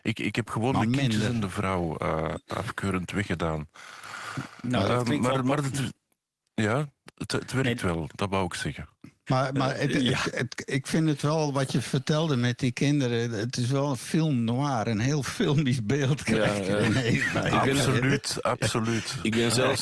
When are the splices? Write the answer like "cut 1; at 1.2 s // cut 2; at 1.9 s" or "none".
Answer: cut 1; at 9.3 s